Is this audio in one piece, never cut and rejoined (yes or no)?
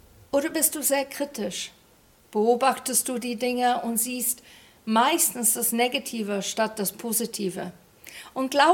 yes